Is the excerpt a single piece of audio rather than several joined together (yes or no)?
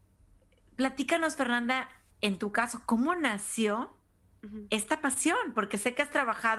yes